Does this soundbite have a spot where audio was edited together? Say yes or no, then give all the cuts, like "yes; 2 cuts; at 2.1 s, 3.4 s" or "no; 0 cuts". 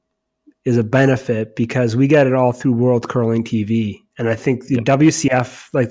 no; 0 cuts